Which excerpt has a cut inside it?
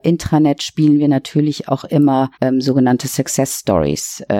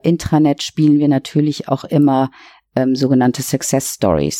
first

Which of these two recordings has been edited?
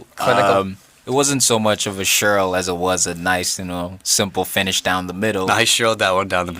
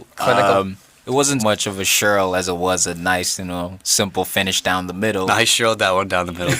second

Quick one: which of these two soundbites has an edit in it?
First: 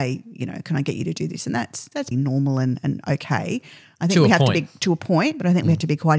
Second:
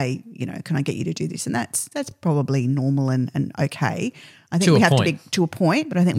first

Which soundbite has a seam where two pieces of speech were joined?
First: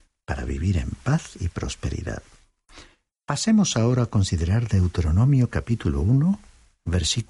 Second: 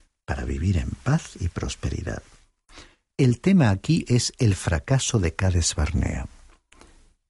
second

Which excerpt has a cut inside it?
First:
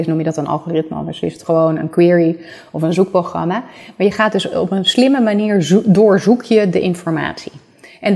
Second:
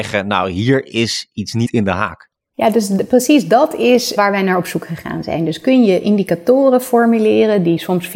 second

